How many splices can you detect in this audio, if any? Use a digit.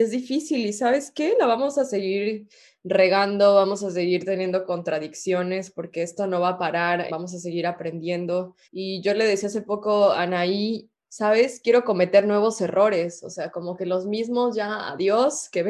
2